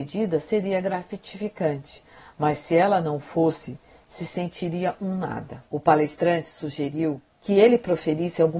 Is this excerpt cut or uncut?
cut